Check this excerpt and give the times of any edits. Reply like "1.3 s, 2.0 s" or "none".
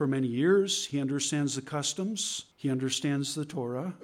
2.5 s

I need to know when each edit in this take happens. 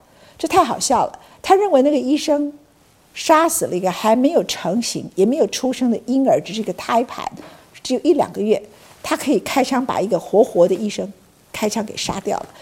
none

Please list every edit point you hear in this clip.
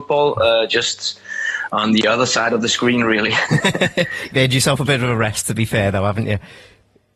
none

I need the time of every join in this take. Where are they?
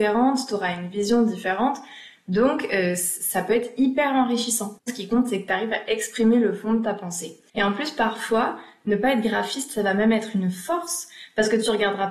4.9 s

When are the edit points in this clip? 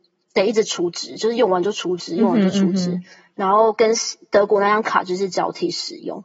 none

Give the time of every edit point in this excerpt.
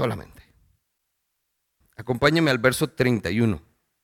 1.8 s

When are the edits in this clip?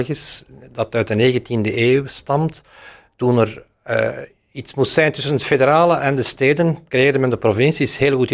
none

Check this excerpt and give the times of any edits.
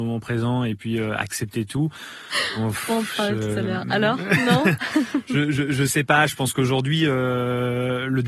none

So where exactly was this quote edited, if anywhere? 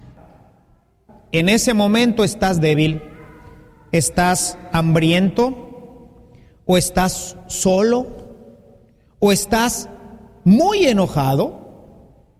none

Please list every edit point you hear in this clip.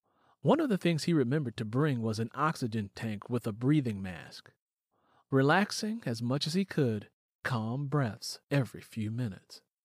7.3 s, 8.4 s

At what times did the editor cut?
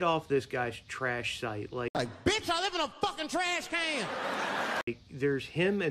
none

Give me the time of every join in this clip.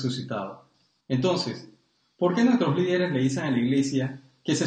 1.0 s

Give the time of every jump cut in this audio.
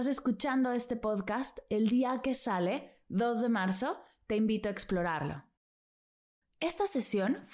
6.4 s

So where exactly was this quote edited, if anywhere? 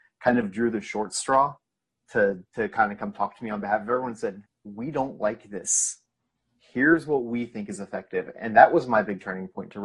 4.5 s

